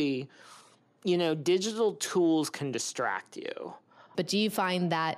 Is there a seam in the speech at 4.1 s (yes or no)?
yes